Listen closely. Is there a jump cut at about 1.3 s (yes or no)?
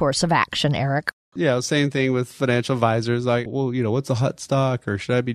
yes